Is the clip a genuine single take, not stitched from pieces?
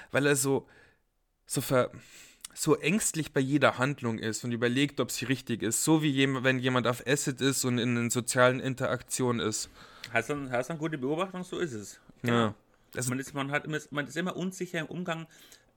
yes; 0 cuts

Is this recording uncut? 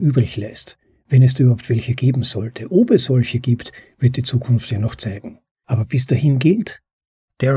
yes; 0 cuts

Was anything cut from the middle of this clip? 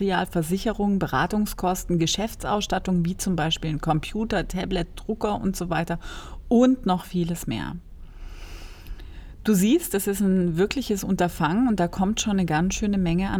no; 0 cuts

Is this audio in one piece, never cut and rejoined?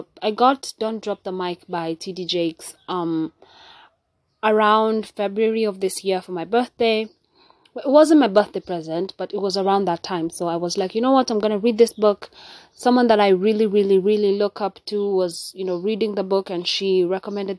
yes; 0 cuts

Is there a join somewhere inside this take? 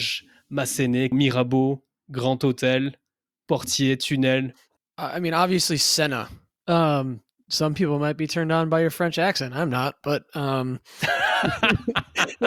yes; 3 cuts; at 1.1 s, 4.8 s, 6.6 s

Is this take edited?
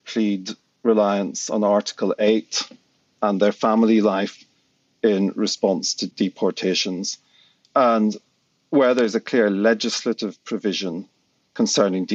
no; 0 cuts

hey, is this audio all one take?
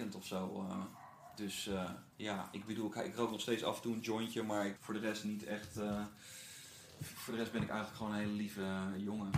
no; 2 cuts; at 2.1 s, 4.8 s

